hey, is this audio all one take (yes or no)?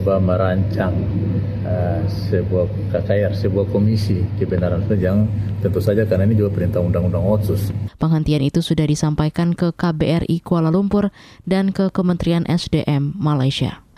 no